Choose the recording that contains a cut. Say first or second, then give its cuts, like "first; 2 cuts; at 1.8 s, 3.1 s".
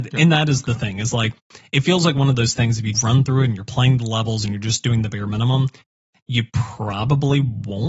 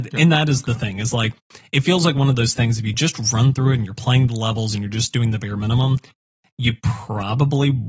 first; 1 cut; at 2.9 s